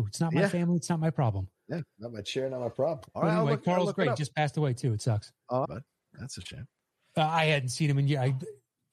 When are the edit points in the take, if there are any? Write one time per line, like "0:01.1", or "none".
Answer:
0:05.6